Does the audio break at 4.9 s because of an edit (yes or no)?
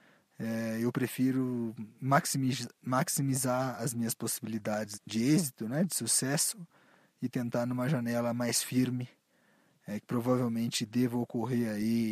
yes